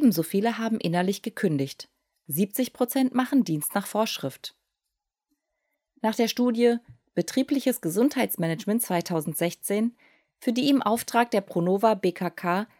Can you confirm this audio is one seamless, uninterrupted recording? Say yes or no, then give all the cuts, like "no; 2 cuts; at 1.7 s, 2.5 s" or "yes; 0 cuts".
yes; 0 cuts